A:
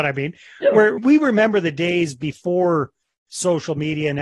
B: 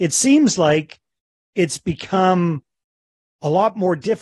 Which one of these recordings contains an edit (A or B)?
A